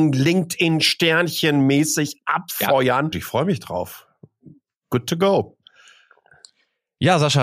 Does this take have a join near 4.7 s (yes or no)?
no